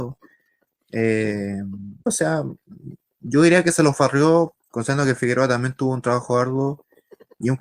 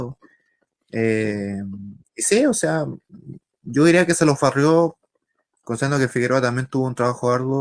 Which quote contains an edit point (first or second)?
first